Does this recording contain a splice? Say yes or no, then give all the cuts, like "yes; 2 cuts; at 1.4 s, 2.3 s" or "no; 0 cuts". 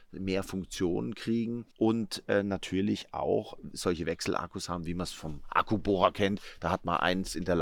yes; 1 cut; at 1.7 s